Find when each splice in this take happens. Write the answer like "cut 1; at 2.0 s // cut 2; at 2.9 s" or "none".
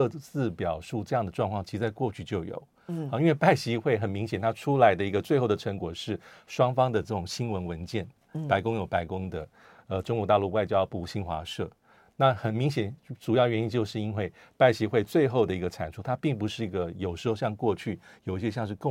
none